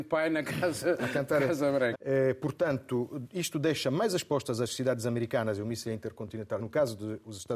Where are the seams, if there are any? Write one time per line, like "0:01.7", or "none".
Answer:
0:01.9
0:06.6

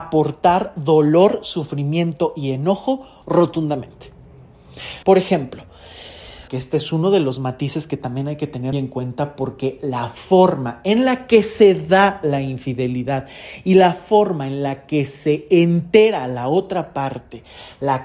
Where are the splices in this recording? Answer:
0:05.0
0:06.5
0:08.7

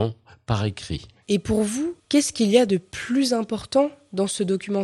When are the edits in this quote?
0:01.2

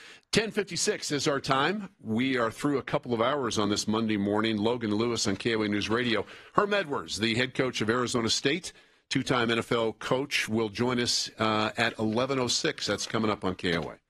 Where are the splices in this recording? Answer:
none

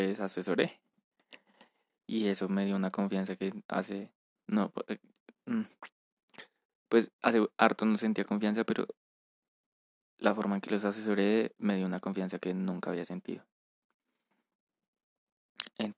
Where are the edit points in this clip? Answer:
none

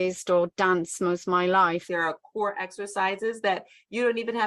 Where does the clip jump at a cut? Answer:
0:01.9

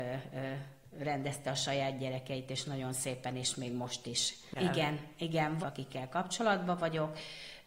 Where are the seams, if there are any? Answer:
0:04.6
0:05.6

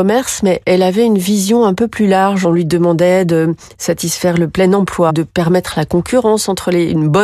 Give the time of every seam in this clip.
0:05.1

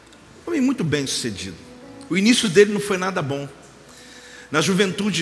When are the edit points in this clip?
0:02.1

